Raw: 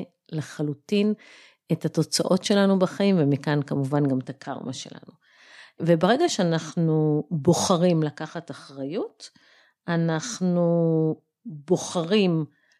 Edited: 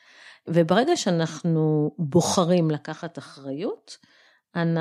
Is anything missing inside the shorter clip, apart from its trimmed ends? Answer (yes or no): no